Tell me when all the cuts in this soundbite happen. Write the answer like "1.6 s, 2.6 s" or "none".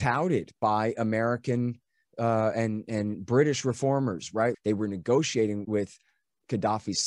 4.5 s, 5.6 s